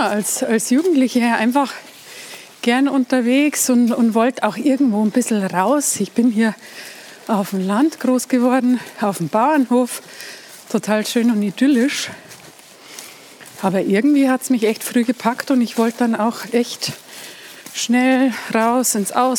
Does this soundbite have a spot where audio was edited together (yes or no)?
no